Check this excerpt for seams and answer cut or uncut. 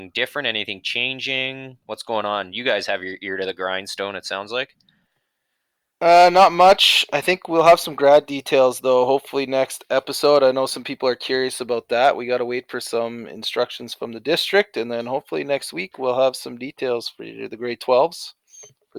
uncut